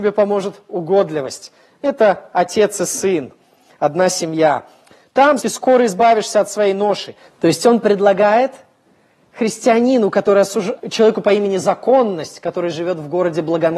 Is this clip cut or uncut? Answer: cut